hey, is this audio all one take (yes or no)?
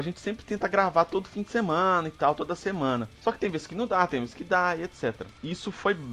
yes